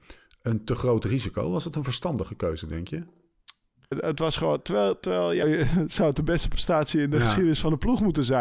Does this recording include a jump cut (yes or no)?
yes